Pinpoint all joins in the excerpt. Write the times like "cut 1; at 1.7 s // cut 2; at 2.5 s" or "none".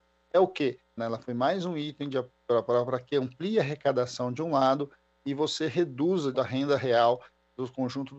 cut 1; at 1.0 s // cut 2; at 6.3 s